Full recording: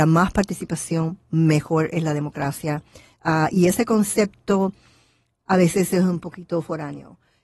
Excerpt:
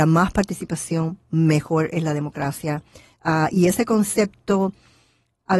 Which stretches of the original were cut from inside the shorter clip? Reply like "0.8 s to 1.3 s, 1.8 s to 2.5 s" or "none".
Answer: none